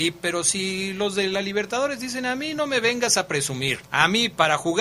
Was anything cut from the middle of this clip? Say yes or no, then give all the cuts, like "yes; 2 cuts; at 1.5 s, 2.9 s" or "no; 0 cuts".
yes; 1 cut; at 3.9 s